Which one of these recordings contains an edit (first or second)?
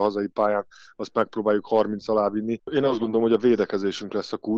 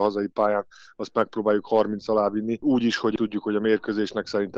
first